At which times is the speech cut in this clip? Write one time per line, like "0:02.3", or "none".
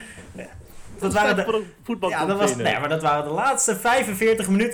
0:01.0